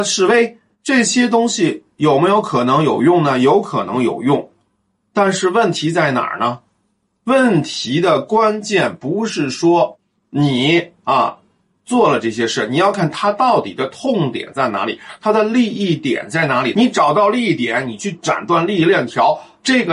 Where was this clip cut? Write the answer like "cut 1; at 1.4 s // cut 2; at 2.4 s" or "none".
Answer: cut 1; at 12.9 s